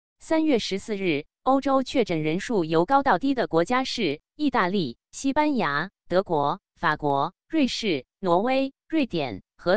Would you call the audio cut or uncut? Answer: uncut